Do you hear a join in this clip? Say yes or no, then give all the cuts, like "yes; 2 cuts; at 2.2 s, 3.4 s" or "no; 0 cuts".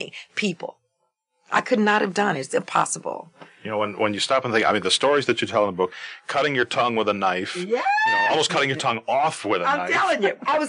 no; 0 cuts